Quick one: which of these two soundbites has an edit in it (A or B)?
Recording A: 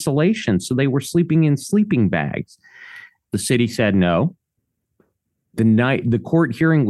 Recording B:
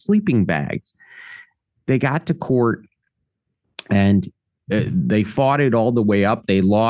A